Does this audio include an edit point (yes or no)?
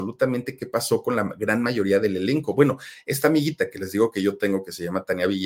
no